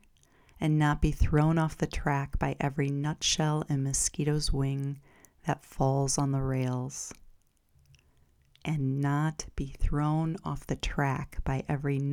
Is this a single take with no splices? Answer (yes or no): yes